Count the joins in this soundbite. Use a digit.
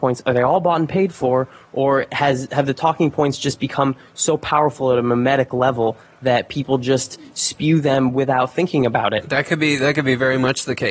0